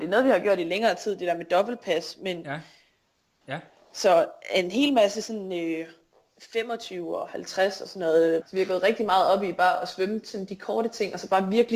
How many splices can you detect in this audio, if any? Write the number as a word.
two